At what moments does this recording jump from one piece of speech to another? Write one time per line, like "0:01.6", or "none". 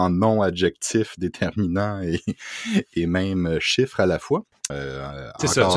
0:04.7